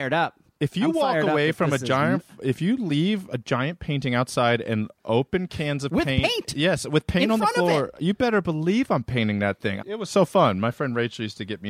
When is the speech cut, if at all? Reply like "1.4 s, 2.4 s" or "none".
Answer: 9.8 s